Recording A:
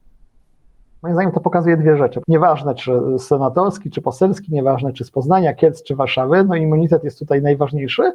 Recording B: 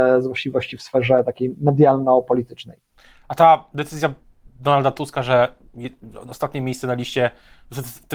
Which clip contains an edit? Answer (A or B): A